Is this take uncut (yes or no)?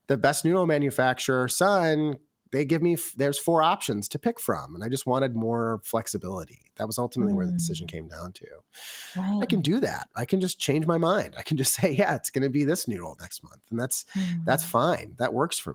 no